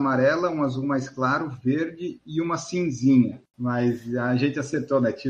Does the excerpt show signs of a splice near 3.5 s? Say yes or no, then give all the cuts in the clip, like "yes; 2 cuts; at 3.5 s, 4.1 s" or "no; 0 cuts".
yes; 1 cut; at 3.5 s